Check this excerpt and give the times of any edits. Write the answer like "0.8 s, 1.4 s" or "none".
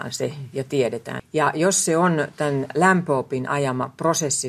1.2 s